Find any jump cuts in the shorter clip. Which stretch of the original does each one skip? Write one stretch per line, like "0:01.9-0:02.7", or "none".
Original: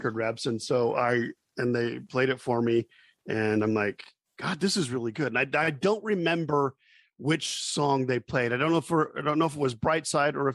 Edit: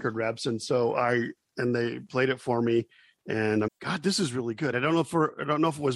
0:03.7-0:04.2
0:05.3-0:08.5